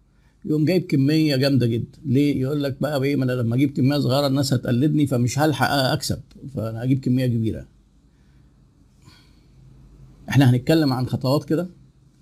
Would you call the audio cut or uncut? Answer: uncut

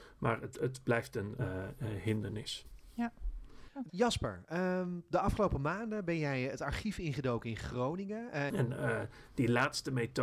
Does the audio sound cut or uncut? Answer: cut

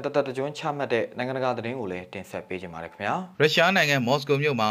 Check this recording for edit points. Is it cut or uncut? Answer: cut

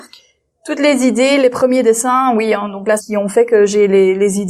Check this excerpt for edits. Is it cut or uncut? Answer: cut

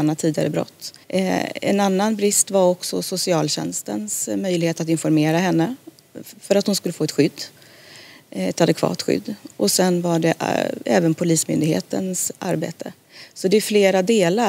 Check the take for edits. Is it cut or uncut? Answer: cut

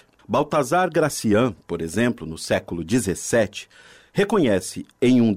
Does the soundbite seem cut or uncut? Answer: uncut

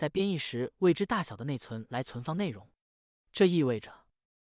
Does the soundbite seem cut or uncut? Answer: uncut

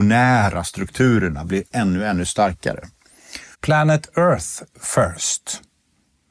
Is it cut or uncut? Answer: cut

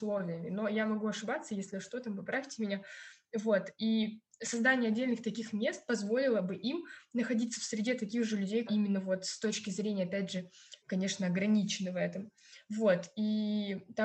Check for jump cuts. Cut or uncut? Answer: cut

